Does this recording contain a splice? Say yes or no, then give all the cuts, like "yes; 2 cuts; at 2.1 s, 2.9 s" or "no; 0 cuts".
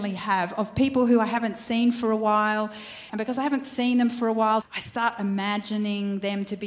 yes; 2 cuts; at 3.1 s, 4.6 s